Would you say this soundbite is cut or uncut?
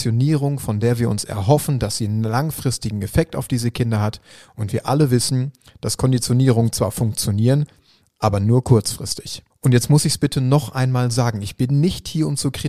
cut